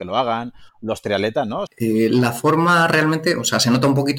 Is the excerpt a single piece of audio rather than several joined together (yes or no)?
no